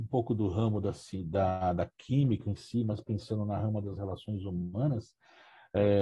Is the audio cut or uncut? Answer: uncut